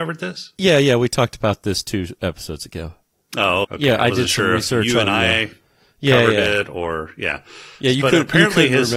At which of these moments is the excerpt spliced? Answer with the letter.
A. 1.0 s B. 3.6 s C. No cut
B